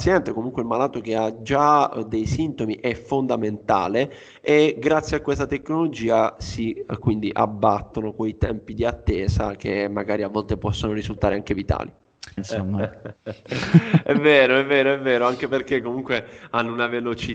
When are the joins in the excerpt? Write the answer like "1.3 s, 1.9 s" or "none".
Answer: 12.4 s